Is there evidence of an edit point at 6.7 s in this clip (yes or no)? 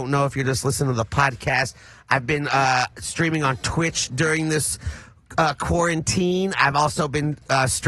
no